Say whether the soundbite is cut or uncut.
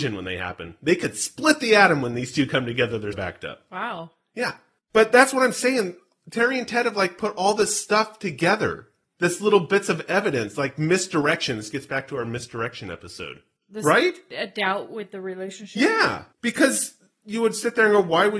cut